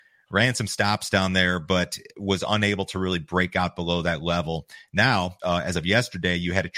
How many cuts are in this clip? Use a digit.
1